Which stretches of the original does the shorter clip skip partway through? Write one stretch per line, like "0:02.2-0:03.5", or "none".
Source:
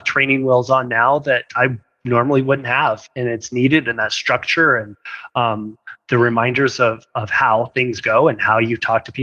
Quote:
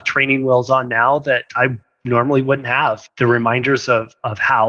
0:03.1-0:06.0